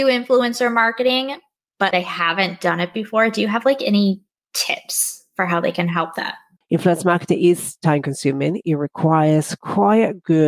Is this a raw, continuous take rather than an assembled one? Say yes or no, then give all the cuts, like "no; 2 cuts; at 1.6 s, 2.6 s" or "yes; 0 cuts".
no; 2 cuts; at 1.9 s, 6.6 s